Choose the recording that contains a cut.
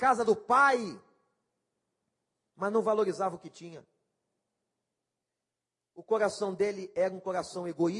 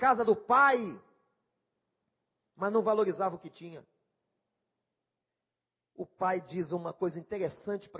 second; 1 cut; at 5.8 s

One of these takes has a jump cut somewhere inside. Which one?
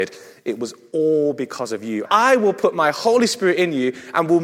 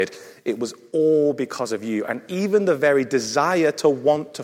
first; 1 cut; at 2.1 s

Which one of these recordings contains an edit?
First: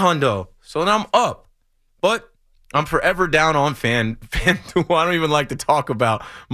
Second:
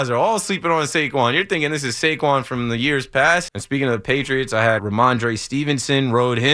second; 2 cuts; at 3.5 s, 4.8 s

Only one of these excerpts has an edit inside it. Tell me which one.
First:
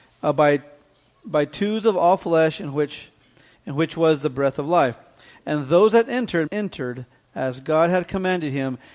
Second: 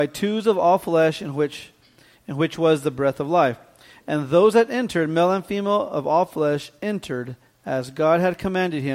first; 1 cut; at 6.5 s

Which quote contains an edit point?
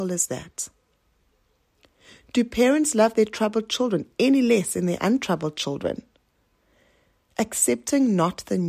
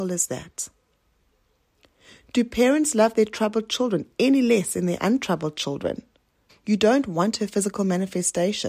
second; 1 cut; at 6.5 s

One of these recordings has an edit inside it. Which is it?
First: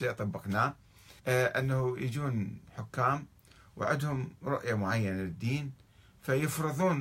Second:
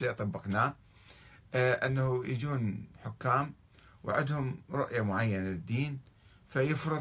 first; 1 cut; at 1.2 s

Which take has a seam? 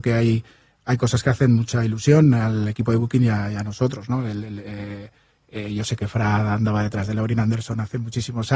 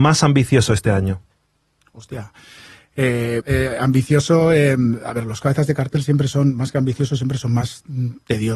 second; 1 cut; at 3.4 s

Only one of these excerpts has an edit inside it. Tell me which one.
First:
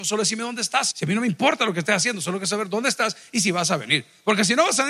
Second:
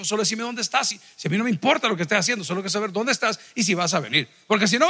first; 1 cut; at 0.9 s

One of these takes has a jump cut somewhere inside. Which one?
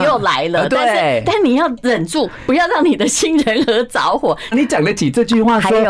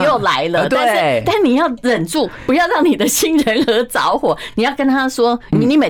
first; 1 cut; at 4.5 s

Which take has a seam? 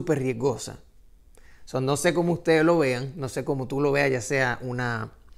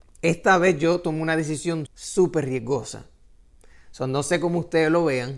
second; 1 cut; at 1.9 s

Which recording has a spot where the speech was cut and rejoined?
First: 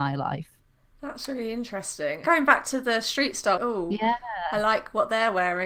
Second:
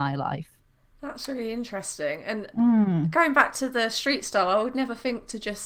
first; 2 cuts; at 2.2 s, 3.6 s

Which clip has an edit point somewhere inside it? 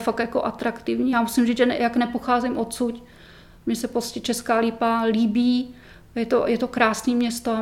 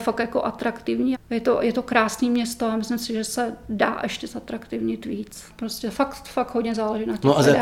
second; 2 cuts; at 1.1 s, 5.5 s

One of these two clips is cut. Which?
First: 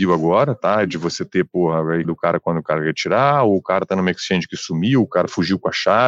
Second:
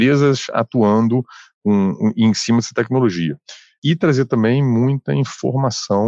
first; 1 cut; at 2.0 s

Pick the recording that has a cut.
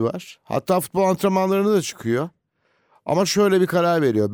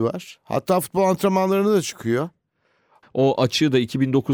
second; 1 cut; at 3.0 s

